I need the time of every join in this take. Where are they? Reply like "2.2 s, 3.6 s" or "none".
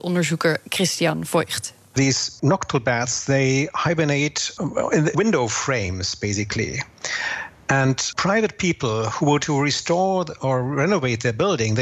5.1 s, 9.4 s